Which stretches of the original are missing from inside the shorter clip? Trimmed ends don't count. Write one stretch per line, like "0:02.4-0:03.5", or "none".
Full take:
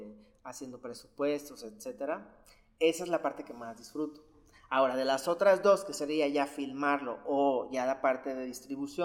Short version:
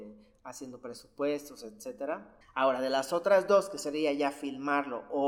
0:02.4-0:04.6